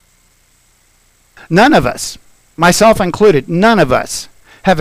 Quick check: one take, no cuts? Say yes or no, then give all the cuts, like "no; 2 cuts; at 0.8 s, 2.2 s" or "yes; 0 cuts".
no; 1 cut; at 1.4 s